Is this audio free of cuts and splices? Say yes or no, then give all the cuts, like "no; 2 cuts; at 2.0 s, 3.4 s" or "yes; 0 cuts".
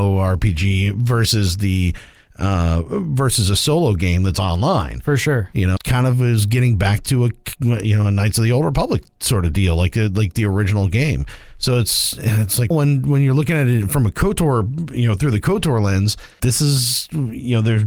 no; 3 cuts; at 5.8 s, 12.7 s, 16.4 s